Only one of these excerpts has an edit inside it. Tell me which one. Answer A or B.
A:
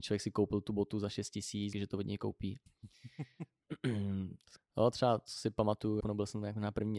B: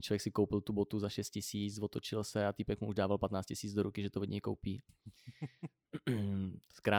A